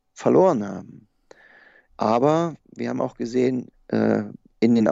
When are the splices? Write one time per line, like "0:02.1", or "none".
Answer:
0:01.9
0:03.7